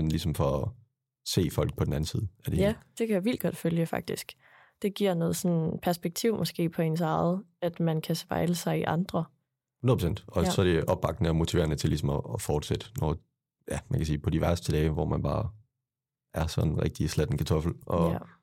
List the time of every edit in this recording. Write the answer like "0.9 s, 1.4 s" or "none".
none